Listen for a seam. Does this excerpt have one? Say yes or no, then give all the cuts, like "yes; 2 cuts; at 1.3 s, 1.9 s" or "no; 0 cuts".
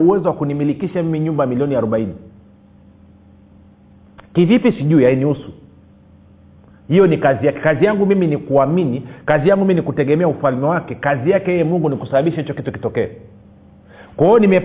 no; 0 cuts